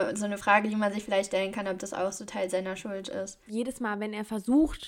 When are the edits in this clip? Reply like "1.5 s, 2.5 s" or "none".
3.5 s